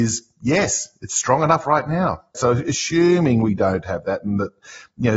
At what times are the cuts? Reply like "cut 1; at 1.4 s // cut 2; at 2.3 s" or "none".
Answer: cut 1; at 2.3 s